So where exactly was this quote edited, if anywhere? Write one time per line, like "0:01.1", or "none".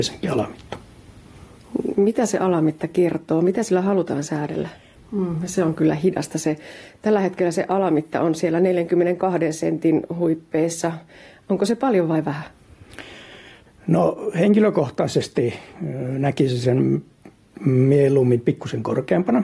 0:05.0